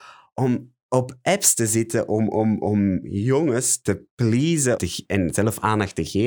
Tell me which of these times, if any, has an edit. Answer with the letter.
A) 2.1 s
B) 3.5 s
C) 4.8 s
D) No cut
C